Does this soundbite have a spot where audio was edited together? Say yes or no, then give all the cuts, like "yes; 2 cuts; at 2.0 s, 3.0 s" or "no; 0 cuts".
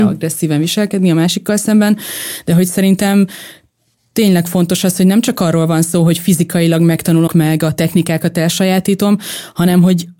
yes; 1 cut; at 7.3 s